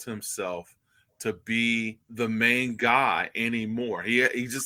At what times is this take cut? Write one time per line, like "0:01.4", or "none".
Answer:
0:02.0

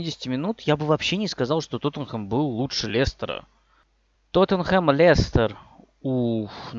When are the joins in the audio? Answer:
0:04.1

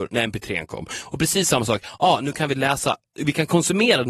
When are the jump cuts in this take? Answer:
none

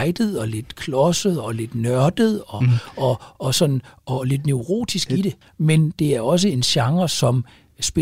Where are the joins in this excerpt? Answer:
0:05.4

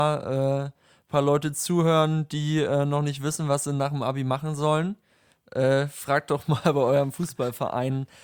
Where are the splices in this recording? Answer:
none

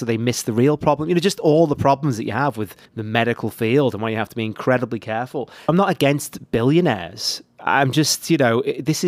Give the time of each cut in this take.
0:02.9

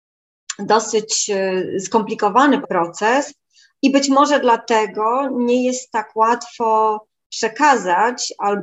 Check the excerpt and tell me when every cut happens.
0:02.6

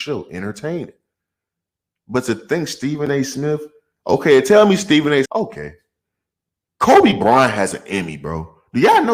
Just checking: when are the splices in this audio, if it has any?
0:05.2

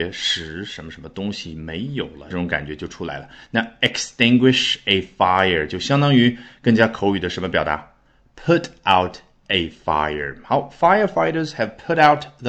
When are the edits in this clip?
0:02.3

